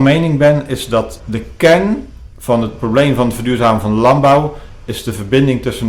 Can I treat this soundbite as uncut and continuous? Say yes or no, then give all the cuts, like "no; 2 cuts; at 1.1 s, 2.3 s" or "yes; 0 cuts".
no; 1 cut; at 1.2 s